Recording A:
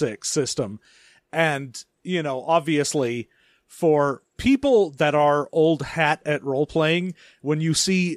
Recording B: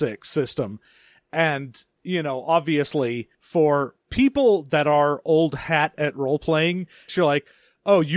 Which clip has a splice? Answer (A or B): B